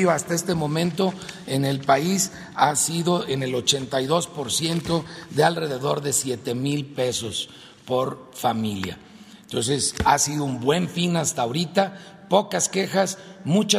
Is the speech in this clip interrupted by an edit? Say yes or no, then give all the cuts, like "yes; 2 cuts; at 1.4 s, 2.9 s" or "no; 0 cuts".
no; 0 cuts